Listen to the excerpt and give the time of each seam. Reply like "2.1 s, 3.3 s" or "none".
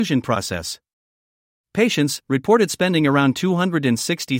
2.2 s

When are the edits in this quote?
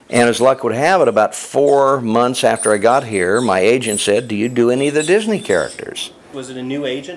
none

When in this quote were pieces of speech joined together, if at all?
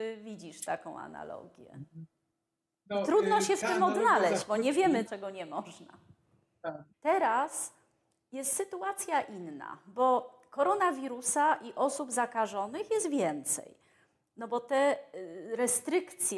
5.1 s, 6.9 s

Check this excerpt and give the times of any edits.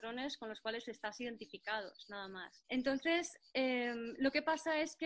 2.6 s

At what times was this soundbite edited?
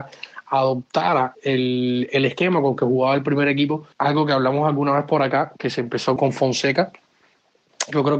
3.9 s, 6.2 s

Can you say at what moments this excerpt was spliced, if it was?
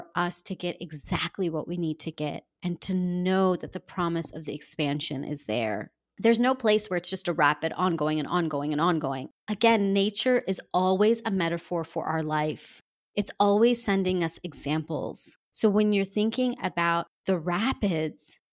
6.1 s

